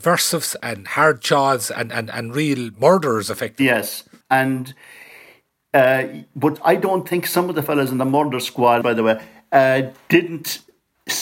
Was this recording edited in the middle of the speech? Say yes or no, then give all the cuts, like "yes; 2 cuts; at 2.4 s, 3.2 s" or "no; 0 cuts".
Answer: yes; 2 cuts; at 4.2 s, 8.8 s